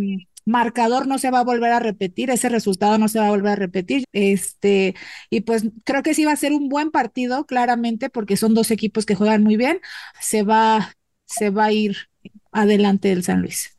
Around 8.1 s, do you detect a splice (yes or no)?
no